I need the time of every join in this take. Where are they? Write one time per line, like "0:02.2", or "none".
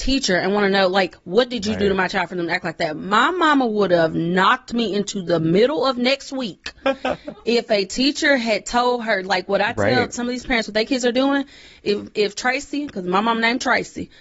none